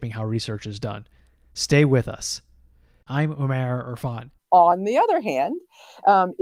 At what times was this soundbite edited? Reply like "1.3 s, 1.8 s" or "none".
3.1 s, 4.4 s